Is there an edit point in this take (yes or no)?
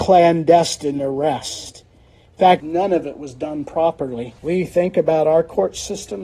yes